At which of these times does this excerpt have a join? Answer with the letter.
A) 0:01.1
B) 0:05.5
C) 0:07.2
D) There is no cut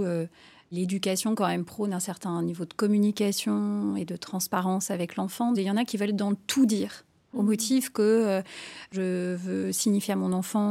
B